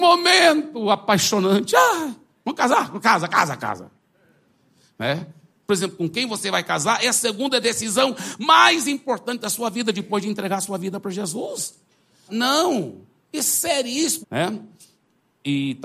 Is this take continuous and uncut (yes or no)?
no